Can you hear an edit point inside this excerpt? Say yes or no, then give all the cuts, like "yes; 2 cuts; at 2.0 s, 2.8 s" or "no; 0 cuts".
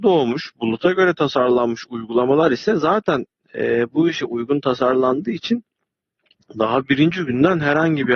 no; 0 cuts